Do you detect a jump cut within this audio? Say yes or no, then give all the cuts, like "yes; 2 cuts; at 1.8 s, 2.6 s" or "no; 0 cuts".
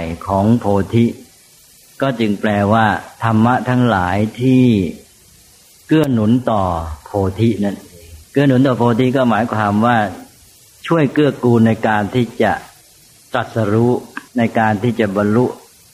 yes; 2 cuts; at 8.2 s, 14.3 s